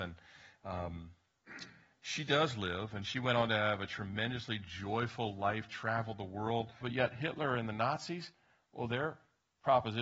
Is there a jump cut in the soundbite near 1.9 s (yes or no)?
no